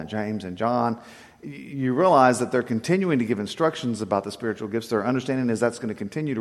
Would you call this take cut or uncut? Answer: uncut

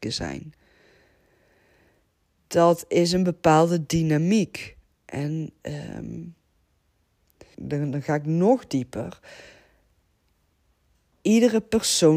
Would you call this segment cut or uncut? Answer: cut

